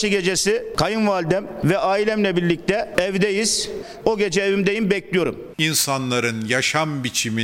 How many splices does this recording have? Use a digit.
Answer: 2